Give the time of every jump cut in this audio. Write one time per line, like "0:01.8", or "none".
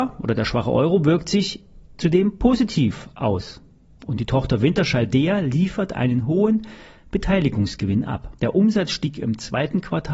0:08.4